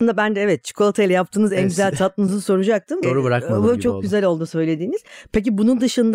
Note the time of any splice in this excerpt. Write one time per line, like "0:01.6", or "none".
0:03.0